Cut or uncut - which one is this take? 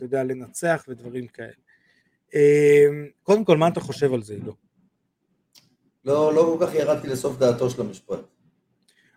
cut